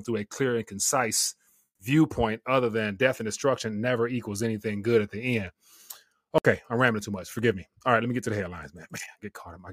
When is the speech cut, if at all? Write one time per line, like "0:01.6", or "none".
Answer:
none